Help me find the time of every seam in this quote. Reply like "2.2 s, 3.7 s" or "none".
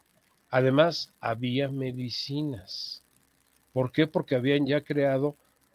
none